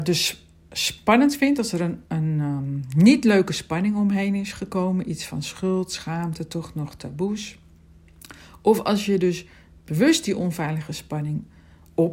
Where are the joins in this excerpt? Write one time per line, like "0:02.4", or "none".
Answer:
none